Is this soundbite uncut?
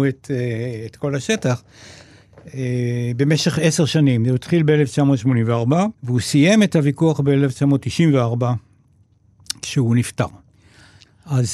no; 1 cut; at 6.0 s

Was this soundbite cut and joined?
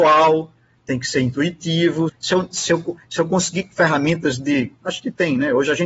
yes; 1 cut; at 2.1 s

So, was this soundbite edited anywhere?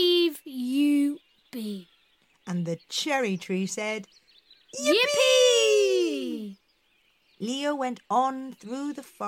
no; 0 cuts

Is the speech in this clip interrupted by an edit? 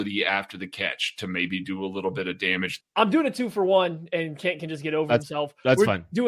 yes; 1 cut; at 2.8 s

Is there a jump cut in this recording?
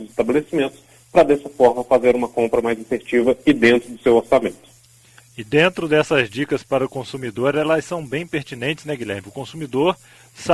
yes; 1 cut; at 9.2 s

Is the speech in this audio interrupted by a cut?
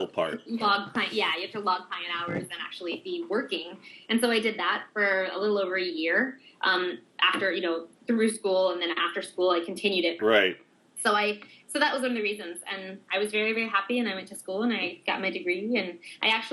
yes; 1 cut; at 10.2 s

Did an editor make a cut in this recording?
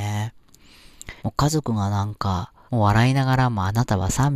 yes; 2 cuts; at 1.2 s, 2.7 s

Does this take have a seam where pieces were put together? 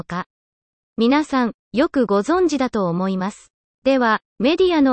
no; 0 cuts

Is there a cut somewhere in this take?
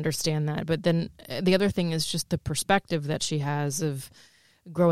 no; 0 cuts

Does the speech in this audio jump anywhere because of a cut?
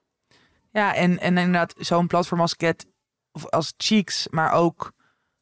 no; 0 cuts

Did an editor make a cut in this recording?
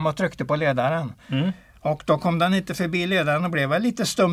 no; 0 cuts

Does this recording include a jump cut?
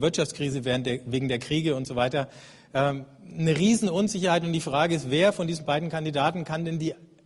no; 0 cuts

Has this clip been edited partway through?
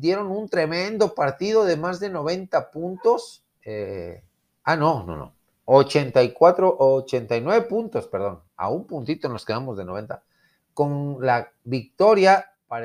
no; 0 cuts

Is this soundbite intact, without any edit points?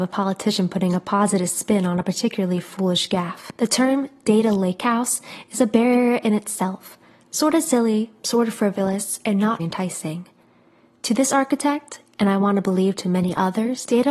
no; 1 cut; at 9.6 s

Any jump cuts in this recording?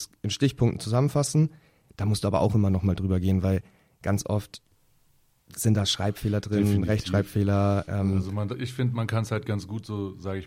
no; 0 cuts

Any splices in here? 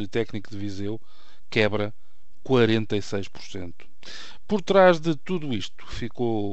no; 0 cuts

